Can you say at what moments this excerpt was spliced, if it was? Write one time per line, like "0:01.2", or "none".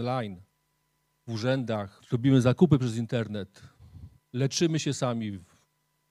0:02.0